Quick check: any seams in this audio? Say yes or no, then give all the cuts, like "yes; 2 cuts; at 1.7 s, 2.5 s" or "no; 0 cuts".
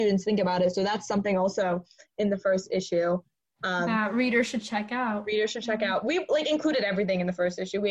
no; 0 cuts